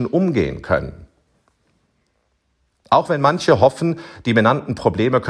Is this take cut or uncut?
uncut